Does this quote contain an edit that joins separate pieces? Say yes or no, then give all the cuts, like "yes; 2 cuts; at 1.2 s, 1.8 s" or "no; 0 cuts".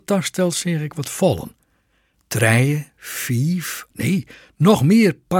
yes; 1 cut; at 3.9 s